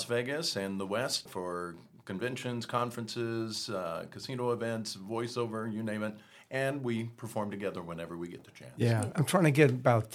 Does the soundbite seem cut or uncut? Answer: cut